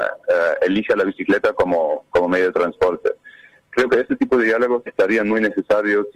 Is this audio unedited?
no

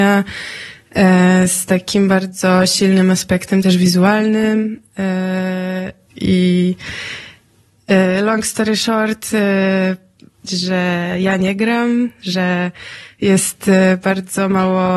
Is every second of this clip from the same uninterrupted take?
no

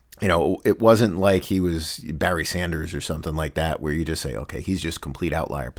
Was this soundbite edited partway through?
no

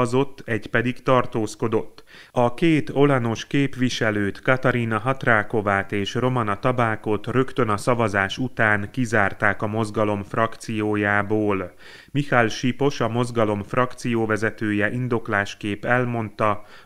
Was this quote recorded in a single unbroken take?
no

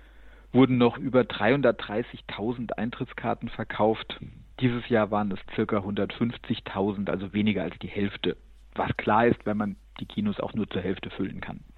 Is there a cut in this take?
yes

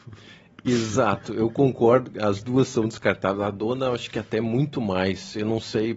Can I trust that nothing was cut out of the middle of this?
yes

